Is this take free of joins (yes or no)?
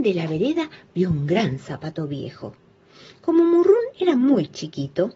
yes